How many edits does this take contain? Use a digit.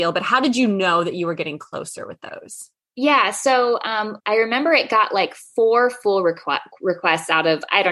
1